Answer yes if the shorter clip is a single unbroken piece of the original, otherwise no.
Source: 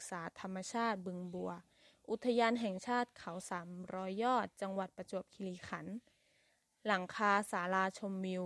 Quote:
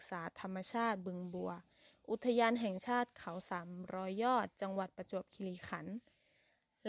yes